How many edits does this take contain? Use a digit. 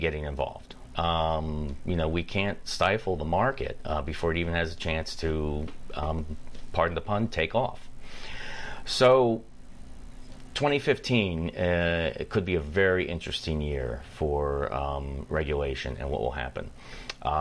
1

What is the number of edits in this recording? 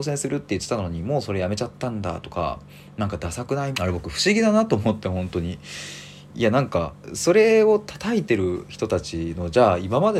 1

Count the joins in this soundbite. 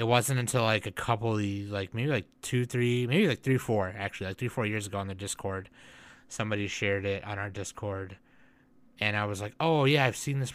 0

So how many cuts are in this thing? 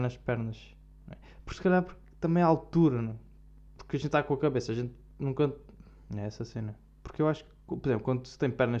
1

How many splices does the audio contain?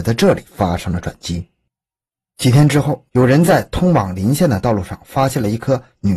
1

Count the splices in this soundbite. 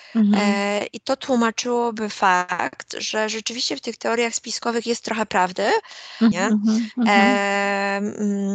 1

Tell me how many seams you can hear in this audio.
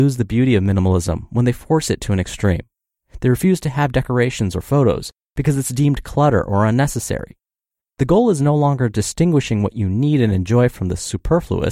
2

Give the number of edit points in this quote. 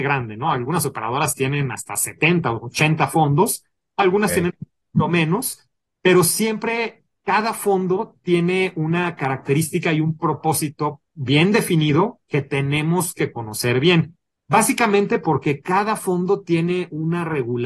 1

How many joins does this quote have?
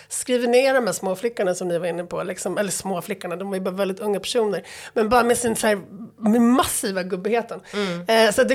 0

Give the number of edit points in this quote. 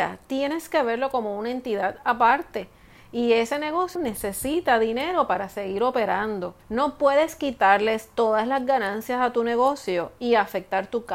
2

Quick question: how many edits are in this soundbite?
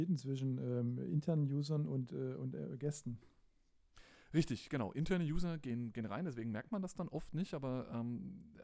0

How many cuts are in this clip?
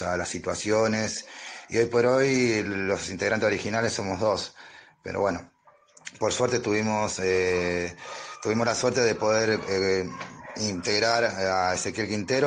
0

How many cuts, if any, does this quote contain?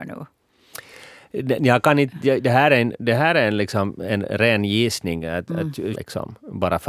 1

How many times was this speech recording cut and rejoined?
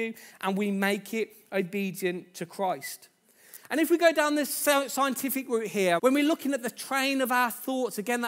1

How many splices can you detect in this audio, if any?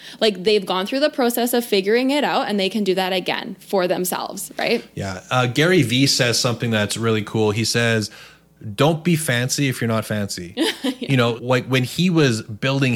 1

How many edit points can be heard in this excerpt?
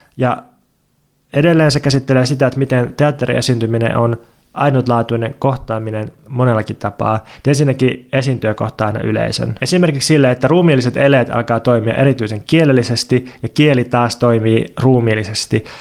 1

